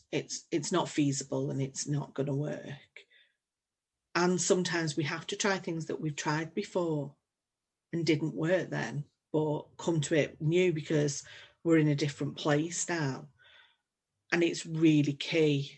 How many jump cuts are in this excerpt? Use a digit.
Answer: 0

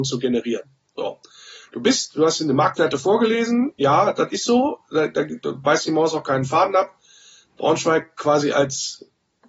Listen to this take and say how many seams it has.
0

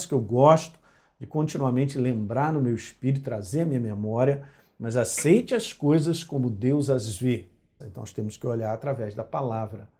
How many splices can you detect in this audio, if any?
1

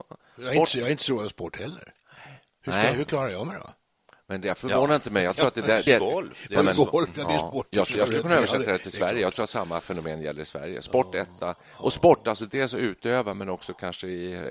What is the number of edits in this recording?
2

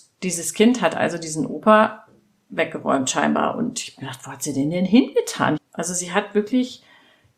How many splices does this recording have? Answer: 1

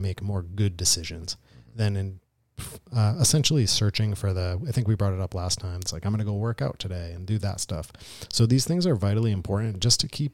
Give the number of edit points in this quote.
1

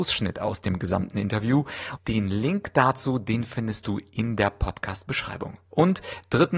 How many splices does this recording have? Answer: 1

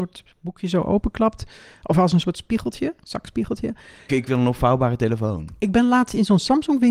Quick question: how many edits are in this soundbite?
1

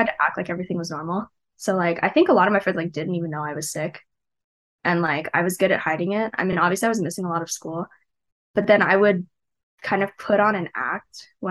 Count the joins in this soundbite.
0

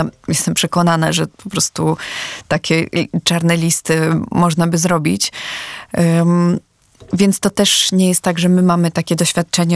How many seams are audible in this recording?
0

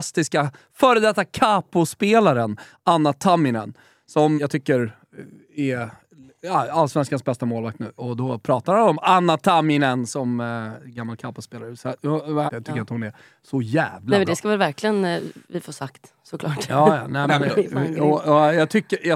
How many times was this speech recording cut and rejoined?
3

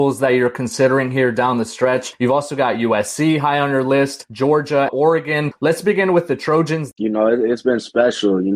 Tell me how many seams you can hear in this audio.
2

